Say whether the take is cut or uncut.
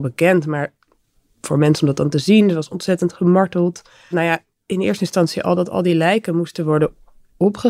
cut